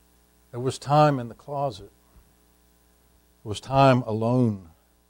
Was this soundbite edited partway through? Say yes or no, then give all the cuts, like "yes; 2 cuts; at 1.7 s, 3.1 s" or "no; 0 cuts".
no; 0 cuts